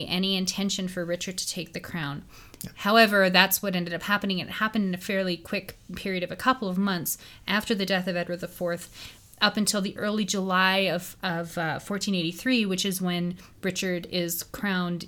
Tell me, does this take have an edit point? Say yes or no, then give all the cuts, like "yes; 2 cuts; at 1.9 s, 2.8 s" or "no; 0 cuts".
no; 0 cuts